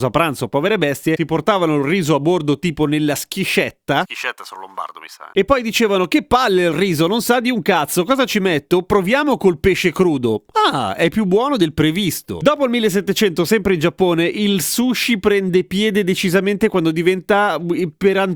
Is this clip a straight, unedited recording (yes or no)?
yes